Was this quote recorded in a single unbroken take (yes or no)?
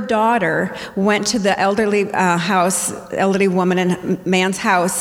yes